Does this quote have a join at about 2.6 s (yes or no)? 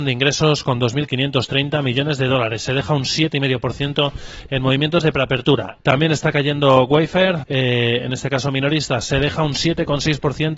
no